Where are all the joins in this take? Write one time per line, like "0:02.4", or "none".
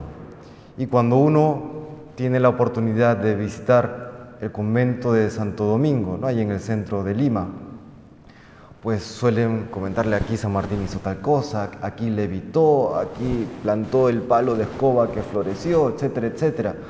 none

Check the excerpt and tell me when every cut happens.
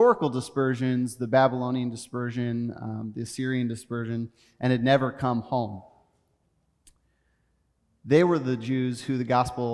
none

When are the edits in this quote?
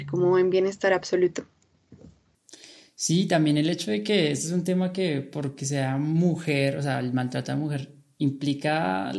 none

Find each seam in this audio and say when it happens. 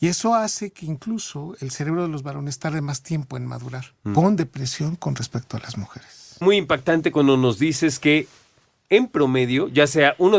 0:04.2

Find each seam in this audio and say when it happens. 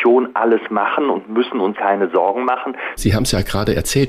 0:01.7
0:03.0

